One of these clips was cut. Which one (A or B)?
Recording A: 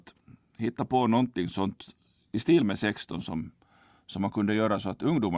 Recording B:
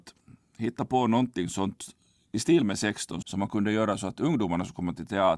B